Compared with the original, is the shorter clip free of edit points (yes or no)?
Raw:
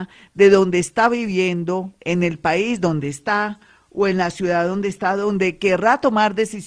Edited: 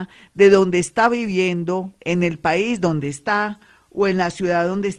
yes